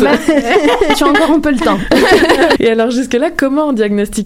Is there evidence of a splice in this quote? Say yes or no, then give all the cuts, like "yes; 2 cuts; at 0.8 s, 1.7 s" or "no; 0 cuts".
yes; 1 cut; at 2.6 s